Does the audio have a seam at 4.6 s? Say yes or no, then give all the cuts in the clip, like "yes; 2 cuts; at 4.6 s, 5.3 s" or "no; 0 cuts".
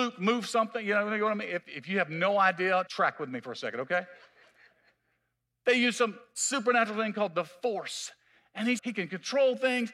no; 3 cuts; at 1.6 s, 2.9 s, 8.8 s